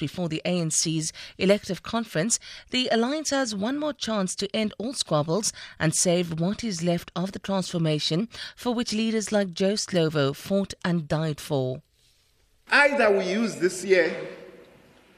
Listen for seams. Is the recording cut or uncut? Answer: uncut